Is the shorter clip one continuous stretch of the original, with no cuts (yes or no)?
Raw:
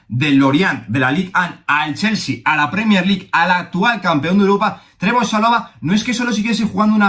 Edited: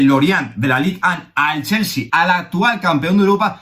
no